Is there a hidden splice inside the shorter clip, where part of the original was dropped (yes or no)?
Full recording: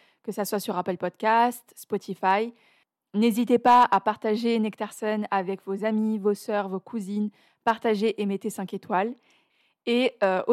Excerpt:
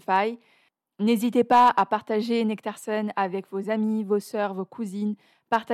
no